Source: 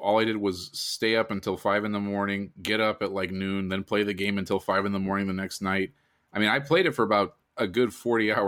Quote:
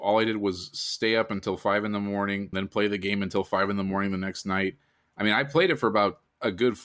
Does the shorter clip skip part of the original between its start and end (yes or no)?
yes